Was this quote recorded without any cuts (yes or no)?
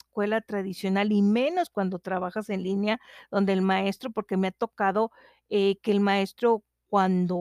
yes